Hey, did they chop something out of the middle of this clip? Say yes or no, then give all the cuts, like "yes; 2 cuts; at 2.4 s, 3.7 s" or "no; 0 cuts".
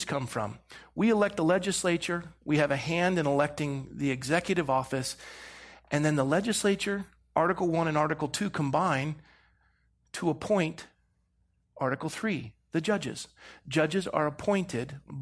no; 0 cuts